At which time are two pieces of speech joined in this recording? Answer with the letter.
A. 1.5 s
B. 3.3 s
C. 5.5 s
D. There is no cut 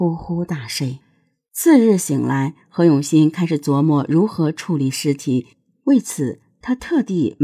D